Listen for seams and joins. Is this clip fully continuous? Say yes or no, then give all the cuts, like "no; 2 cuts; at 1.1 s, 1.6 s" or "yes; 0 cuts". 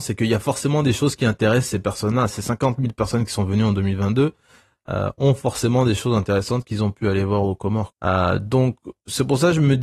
no; 1 cut; at 7.9 s